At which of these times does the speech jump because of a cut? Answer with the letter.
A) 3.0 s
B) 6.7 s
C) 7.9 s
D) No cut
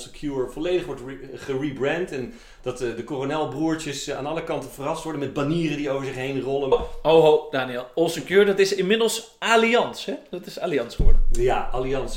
B